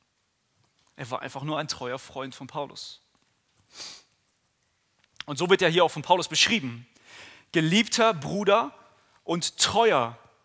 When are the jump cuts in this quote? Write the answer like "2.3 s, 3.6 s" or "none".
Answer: none